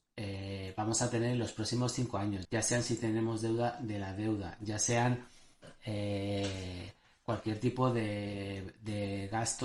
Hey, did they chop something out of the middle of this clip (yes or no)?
yes